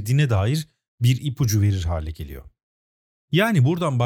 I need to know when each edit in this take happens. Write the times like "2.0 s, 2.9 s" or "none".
3.1 s